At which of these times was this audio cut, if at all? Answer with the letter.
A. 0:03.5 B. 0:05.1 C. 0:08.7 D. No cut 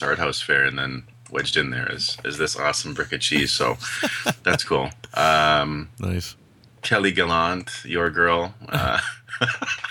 D